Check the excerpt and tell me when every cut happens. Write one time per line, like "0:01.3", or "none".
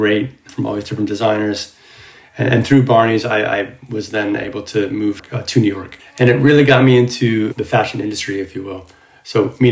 0:06.0